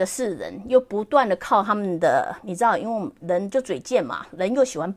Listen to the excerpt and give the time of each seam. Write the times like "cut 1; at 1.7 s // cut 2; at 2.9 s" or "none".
cut 1; at 3.2 s